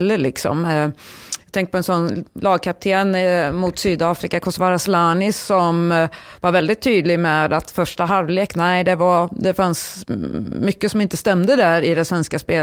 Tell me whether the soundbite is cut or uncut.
uncut